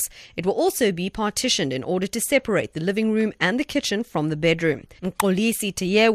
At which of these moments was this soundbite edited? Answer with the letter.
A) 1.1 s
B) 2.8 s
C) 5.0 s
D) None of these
C